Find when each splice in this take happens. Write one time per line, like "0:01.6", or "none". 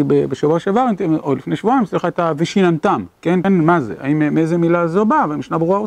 0:03.4